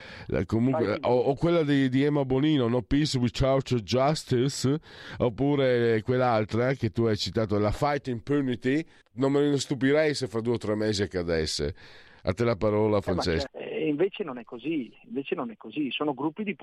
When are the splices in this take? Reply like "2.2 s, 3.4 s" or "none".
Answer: 9.0 s, 13.5 s